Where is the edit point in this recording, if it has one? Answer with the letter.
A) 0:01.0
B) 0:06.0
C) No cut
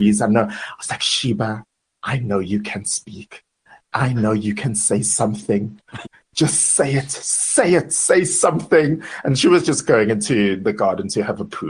B